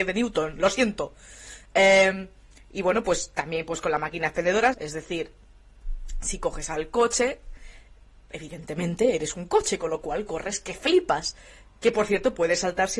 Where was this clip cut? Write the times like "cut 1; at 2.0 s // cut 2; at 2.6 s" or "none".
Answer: cut 1; at 4.7 s